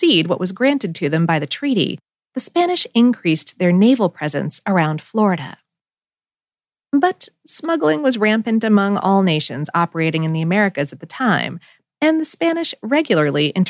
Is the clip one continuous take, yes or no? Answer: yes